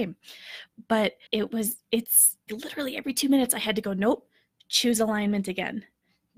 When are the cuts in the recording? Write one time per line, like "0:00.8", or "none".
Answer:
0:01.3
0:02.5